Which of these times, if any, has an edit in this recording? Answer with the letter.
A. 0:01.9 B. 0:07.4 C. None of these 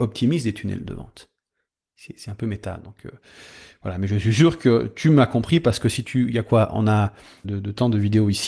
B